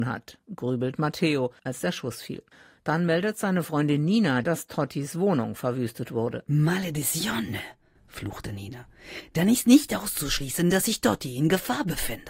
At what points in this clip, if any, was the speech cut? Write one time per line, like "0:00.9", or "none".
0:01.6
0:04.4